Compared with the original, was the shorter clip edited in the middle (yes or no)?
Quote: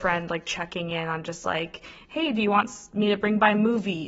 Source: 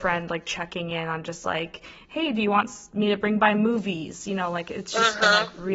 no